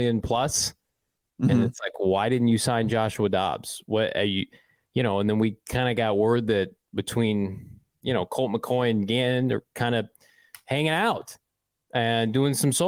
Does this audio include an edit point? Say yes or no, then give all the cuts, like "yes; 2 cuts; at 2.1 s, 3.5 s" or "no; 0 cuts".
no; 0 cuts